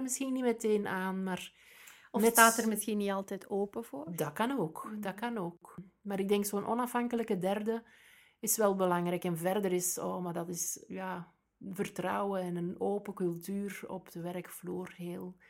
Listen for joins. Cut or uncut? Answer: uncut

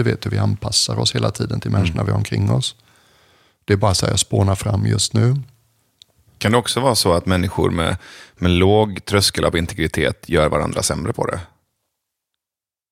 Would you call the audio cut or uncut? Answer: uncut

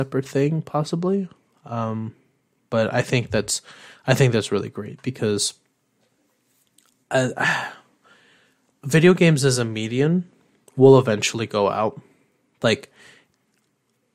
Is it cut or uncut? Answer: uncut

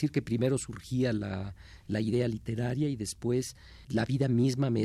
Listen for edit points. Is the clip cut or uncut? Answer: cut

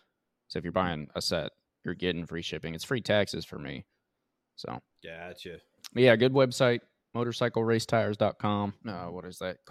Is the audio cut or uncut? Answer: cut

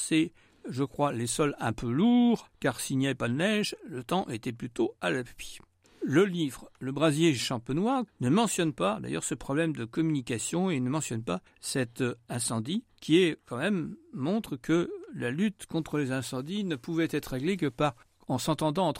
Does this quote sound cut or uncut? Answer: cut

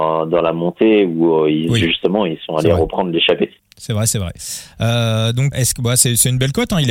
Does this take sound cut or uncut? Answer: cut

